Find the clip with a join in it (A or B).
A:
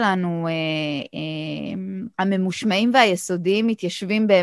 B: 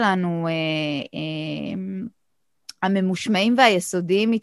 A